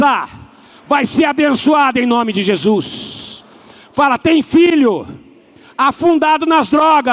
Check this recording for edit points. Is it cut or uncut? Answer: uncut